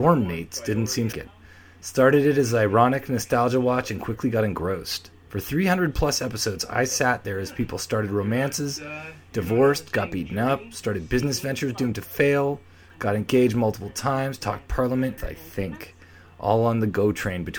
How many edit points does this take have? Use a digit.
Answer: 2